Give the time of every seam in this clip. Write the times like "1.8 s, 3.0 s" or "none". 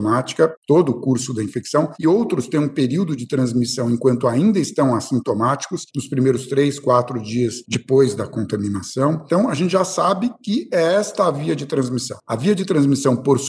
none